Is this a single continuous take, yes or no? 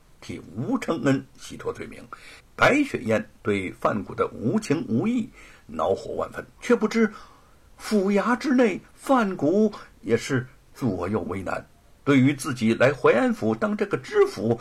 no